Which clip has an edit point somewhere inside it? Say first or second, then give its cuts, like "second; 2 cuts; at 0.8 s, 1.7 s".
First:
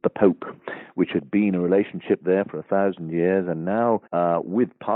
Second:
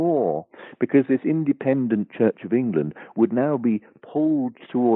first; 1 cut; at 4.1 s